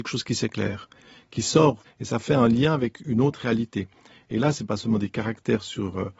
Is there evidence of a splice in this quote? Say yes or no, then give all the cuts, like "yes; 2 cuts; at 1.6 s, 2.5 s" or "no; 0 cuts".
yes; 2 cuts; at 1.8 s, 4.5 s